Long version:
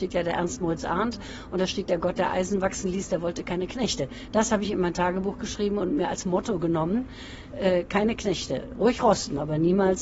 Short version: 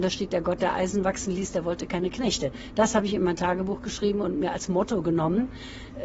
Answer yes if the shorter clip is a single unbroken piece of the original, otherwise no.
yes